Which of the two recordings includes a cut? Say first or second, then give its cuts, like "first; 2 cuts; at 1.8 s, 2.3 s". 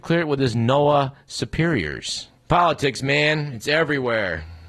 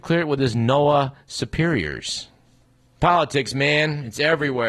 first; 1 cut; at 2.4 s